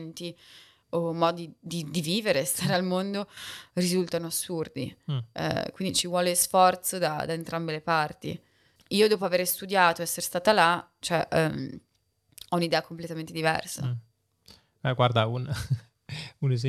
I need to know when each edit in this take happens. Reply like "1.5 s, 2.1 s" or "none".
none